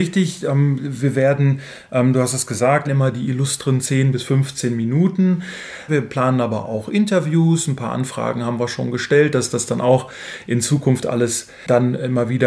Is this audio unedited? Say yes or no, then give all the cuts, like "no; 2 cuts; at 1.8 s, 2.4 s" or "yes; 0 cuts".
no; 2 cuts; at 2.8 s, 5.9 s